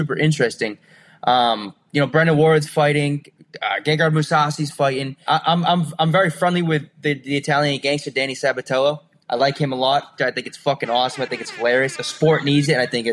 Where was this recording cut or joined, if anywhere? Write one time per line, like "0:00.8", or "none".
0:05.3
0:10.2
0:11.9

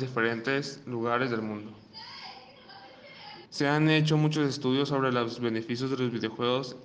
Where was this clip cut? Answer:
0:03.5

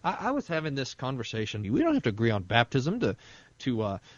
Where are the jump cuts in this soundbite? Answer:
0:01.6

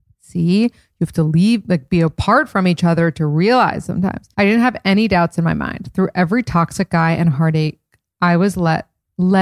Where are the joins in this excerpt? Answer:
0:04.3

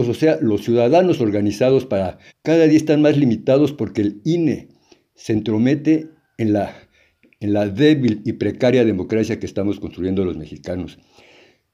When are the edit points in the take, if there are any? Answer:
0:02.3

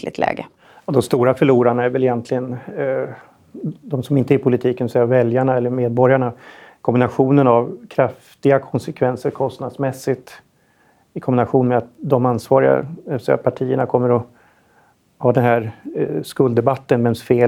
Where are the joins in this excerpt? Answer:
none

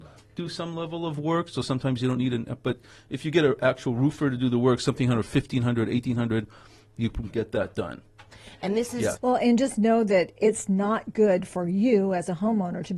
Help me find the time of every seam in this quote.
0:07.3
0:09.2

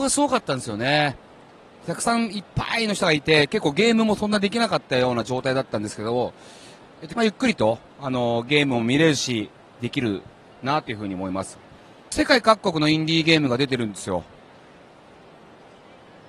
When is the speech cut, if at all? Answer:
0:07.2

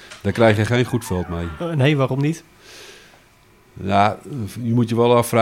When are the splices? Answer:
none

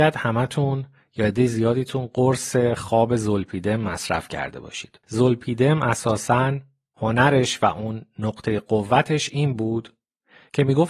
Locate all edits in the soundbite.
0:05.0

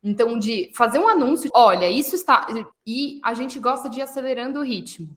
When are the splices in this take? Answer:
0:01.5
0:02.7

